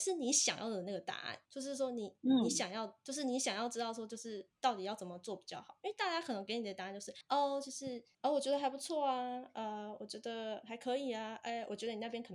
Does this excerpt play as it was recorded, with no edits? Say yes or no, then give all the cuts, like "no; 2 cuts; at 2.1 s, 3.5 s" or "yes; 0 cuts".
yes; 0 cuts